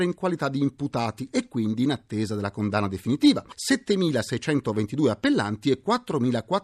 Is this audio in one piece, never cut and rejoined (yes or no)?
no